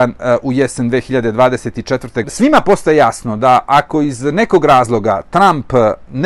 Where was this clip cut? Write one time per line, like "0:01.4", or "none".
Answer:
0:02.2